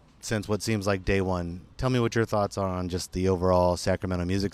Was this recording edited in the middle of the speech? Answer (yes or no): no